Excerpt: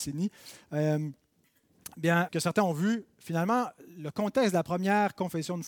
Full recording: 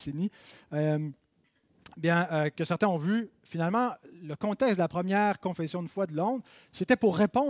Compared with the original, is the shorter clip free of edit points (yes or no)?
no